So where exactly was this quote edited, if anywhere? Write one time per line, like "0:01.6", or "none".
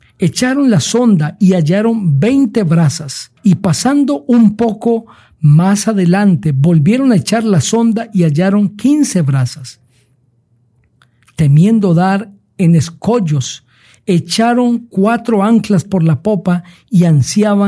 0:03.4